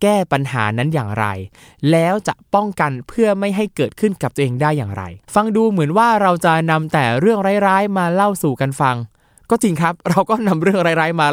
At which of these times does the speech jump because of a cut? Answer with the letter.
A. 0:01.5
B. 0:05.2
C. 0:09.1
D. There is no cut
B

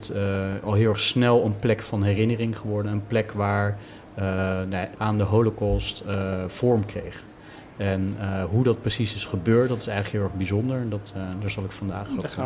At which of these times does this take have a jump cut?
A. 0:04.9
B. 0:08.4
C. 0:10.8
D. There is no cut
A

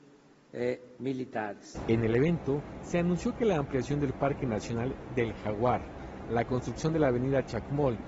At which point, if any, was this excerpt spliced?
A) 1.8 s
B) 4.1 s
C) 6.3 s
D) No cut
D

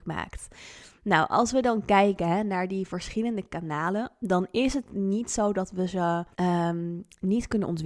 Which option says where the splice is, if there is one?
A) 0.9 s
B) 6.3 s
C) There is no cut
B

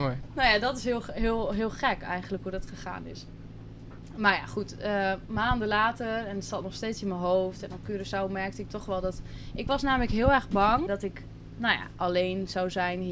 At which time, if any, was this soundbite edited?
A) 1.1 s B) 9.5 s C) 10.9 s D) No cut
C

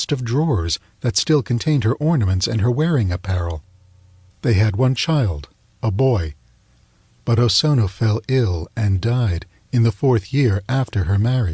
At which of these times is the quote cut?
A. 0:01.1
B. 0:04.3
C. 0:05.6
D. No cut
B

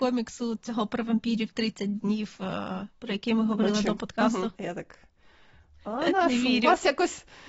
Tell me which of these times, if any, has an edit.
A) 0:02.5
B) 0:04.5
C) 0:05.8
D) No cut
B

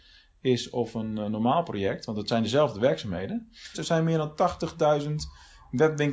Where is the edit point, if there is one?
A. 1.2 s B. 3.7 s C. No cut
B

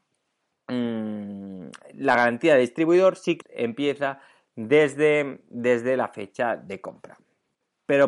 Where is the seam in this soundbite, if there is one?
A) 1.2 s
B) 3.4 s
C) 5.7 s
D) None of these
B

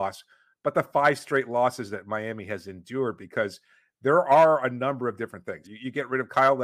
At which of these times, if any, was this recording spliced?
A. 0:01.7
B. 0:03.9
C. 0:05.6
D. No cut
C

